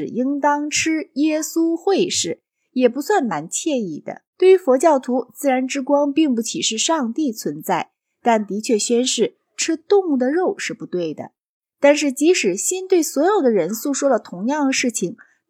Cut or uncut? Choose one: cut